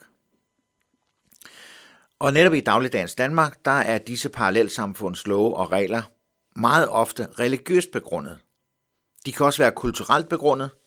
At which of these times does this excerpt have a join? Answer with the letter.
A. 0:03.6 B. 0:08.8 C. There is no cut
C